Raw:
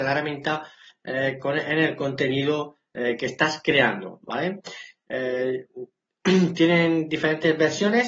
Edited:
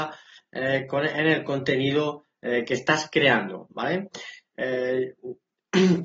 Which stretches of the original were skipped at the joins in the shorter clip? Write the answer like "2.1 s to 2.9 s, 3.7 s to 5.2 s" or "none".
none